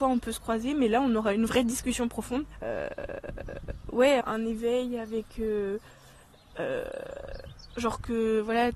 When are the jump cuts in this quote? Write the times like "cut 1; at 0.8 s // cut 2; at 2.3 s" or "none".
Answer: cut 1; at 2.6 s // cut 2; at 4.2 s